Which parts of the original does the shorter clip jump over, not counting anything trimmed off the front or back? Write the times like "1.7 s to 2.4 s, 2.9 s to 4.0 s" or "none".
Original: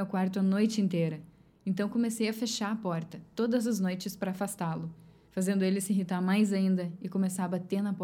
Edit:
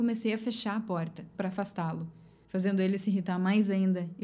3.3 s to 4.2 s

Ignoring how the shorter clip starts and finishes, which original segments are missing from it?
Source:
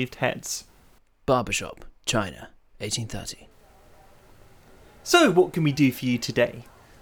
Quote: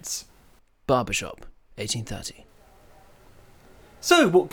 2.0 s to 2.6 s

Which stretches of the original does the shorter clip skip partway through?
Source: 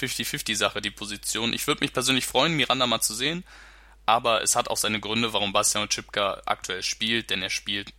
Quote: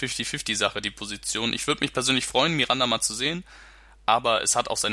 none

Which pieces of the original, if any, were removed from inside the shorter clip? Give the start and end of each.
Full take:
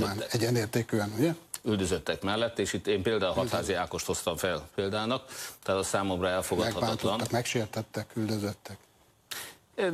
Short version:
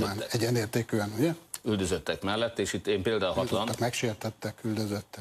3.5 s to 7.0 s

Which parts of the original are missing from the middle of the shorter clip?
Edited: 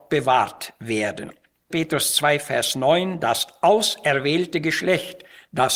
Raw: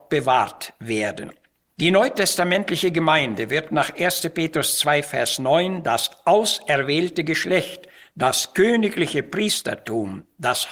1.7 s to 4.3 s

